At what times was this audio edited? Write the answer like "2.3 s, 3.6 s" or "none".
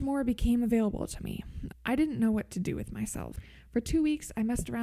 1.7 s